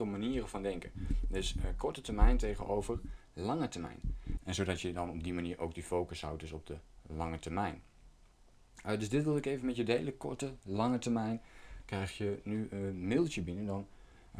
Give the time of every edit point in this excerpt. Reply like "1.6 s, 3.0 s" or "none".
4.4 s, 11.8 s